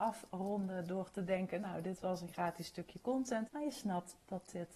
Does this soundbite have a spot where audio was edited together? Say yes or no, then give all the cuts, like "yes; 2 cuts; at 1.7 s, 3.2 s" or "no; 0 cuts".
yes; 1 cut; at 3.5 s